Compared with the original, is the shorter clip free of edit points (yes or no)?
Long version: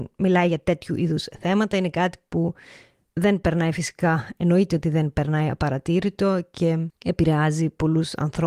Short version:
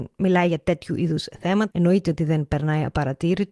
no